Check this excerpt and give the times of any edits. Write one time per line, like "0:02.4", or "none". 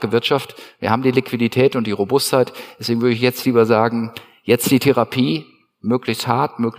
none